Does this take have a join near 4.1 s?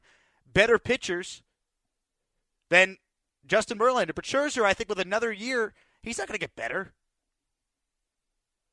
no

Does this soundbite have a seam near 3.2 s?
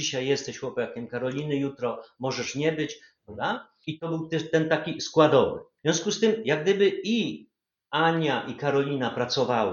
yes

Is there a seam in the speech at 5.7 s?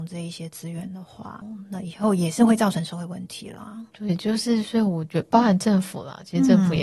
no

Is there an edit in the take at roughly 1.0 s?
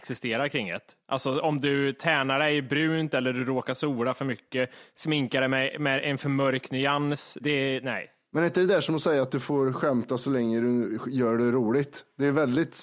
no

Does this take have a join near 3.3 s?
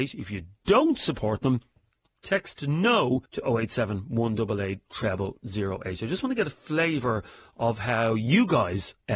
yes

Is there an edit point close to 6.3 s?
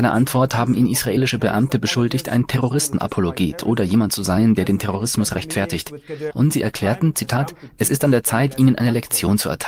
yes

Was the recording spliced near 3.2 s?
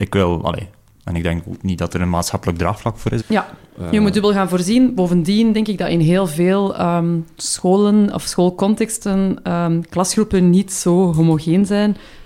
yes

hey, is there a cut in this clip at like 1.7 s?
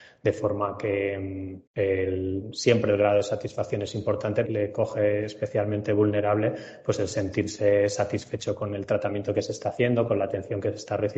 yes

